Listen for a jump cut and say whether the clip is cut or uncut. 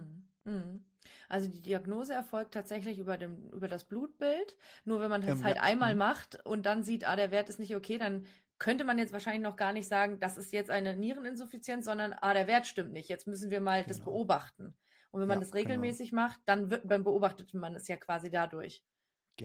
uncut